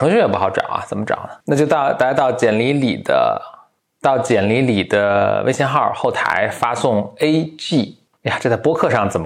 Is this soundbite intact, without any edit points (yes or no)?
no